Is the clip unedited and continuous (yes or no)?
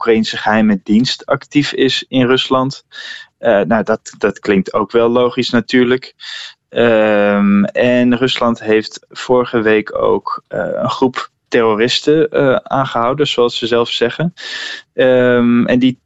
yes